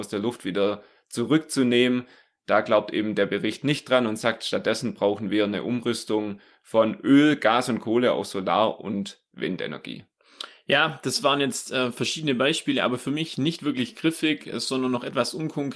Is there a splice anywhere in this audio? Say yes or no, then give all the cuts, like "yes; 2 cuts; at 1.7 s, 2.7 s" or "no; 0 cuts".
no; 0 cuts